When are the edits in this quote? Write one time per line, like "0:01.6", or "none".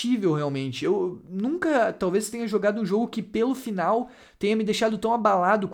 none